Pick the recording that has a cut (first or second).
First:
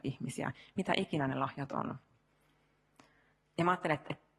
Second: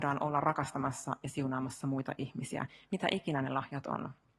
first